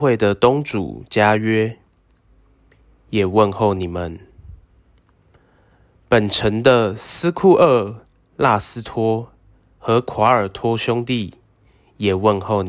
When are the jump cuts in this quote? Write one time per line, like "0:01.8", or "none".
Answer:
none